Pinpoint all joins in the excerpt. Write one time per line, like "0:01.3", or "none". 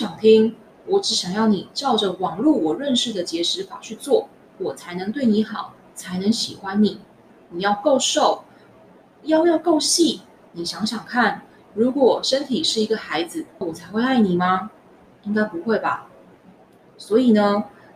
0:10.5
0:13.6

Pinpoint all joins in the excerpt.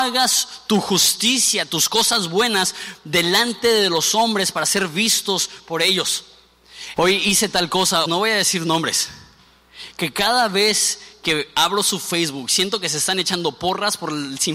0:07.0
0:08.1

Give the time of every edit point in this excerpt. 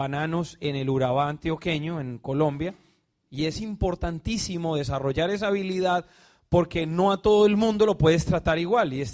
0:03.2

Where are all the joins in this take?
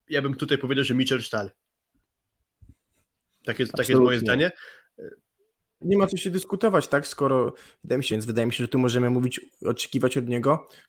0:05.8
0:08.1

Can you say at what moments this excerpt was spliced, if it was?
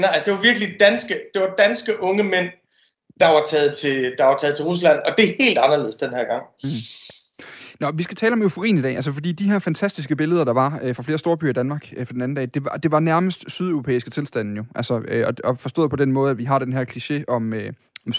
none

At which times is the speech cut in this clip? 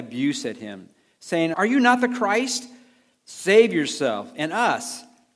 0:01.5

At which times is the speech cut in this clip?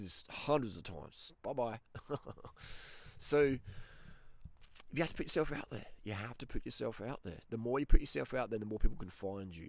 0:01.4

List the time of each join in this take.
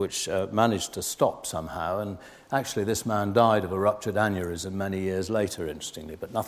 none

